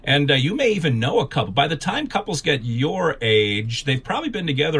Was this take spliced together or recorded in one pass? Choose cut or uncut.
uncut